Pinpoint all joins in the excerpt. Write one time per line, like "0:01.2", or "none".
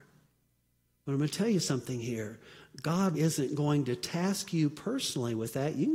0:03.1